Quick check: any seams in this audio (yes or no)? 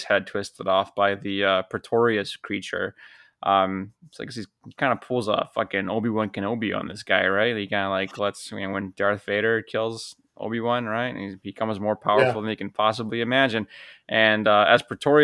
no